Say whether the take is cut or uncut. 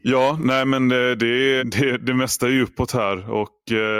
cut